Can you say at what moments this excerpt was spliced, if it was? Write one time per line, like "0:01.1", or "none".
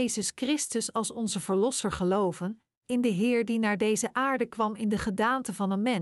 none